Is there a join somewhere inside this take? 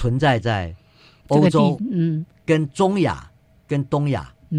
no; 0 cuts

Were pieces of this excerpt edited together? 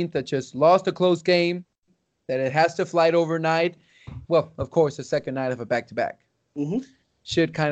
yes; 1 cut; at 4.2 s

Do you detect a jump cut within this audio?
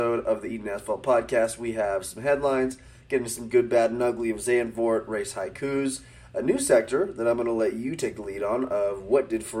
no; 0 cuts

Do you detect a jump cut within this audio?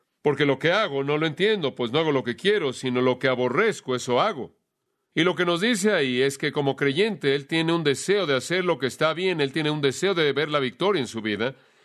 no; 0 cuts

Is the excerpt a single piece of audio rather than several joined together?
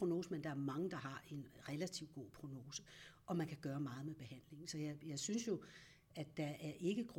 yes; 0 cuts

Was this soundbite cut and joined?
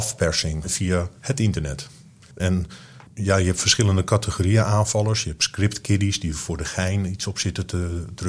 yes; 1 cut; at 2.4 s

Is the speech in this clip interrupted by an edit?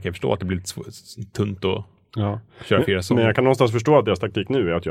no; 0 cuts

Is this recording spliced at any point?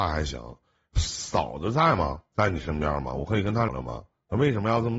yes; 1 cut; at 3.7 s

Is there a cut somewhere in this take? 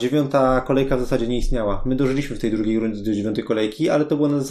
no; 0 cuts

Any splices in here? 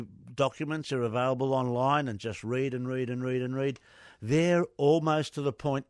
no; 0 cuts

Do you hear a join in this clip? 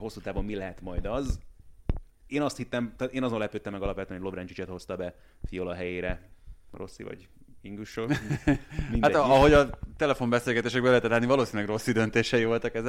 no; 0 cuts

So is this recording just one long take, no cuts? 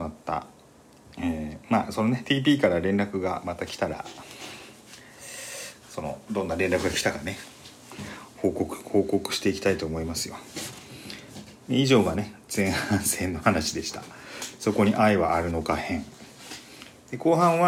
yes; 0 cuts

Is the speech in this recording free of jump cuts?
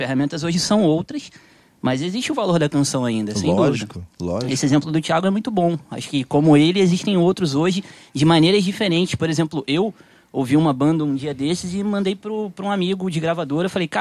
yes; 0 cuts

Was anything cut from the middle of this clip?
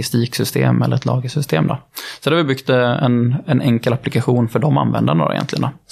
no; 0 cuts

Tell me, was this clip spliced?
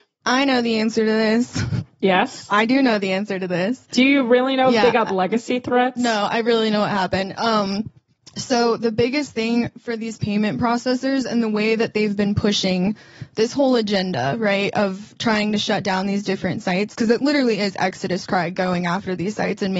no; 0 cuts

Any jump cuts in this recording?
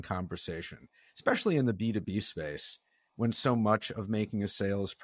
no; 0 cuts

